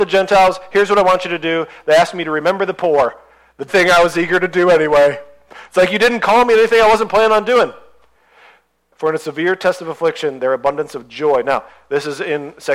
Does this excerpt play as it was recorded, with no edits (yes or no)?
no